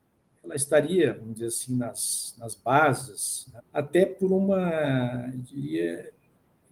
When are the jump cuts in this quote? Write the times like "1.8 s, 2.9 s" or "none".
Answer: 3.6 s

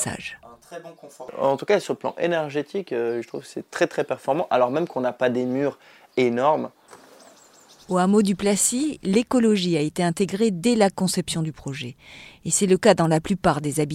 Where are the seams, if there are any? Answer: none

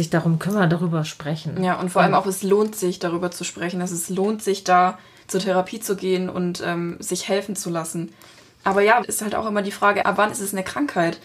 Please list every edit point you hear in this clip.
9.0 s, 10.0 s

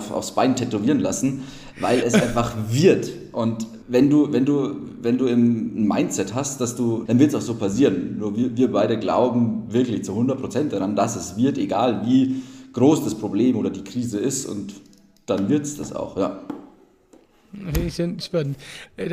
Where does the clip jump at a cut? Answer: 3.8 s, 7.1 s

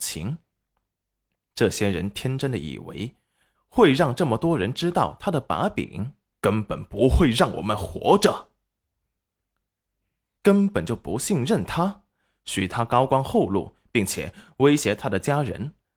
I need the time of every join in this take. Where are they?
3.5 s, 6.3 s, 10.4 s

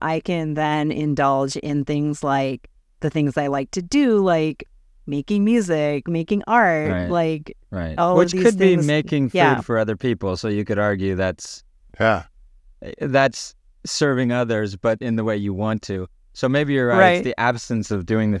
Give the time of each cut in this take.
none

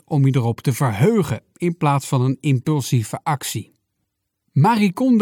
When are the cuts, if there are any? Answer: none

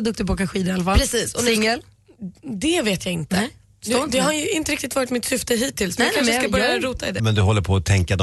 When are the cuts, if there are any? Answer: 7.2 s

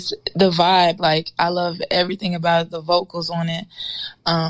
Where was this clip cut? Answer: 1.0 s

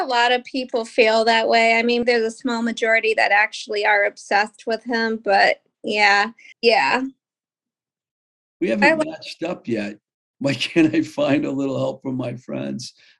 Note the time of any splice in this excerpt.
2.0 s, 6.5 s, 10.2 s

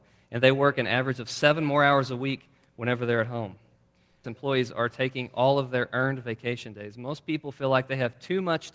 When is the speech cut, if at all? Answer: 4.2 s

